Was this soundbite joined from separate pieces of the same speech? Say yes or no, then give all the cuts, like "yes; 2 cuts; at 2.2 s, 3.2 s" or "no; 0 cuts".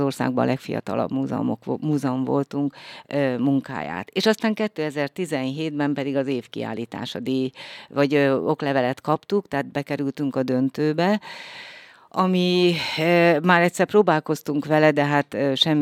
no; 0 cuts